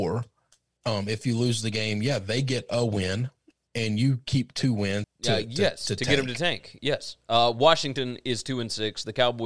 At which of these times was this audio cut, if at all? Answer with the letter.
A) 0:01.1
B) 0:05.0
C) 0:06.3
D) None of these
B